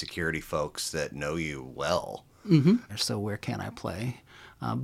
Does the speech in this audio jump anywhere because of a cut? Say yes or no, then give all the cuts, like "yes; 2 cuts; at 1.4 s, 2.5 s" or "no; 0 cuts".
yes; 1 cut; at 2.9 s